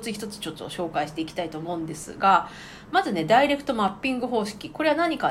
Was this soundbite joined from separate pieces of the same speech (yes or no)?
no